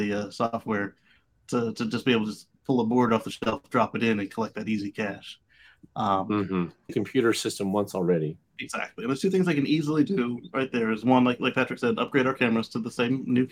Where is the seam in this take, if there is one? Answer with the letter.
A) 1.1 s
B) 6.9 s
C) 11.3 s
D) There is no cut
B